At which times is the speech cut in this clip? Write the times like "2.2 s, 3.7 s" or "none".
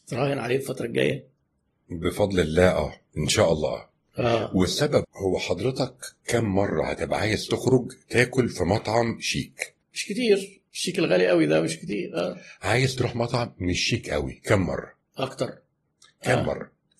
5.0 s, 9.8 s